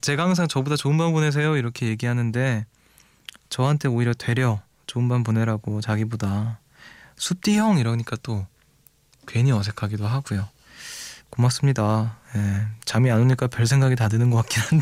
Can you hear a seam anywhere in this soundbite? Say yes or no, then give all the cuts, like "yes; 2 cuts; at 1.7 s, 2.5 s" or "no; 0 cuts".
no; 0 cuts